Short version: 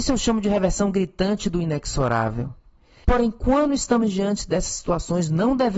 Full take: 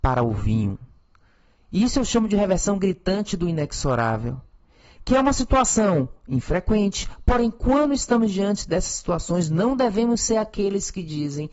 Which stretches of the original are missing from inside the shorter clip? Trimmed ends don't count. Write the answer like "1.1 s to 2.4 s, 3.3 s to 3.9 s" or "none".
4.9 s to 7.2 s